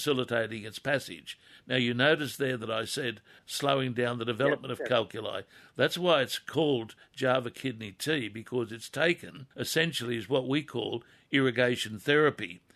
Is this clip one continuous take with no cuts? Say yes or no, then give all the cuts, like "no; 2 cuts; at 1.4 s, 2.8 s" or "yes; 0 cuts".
no; 2 cuts; at 3.4 s, 9.5 s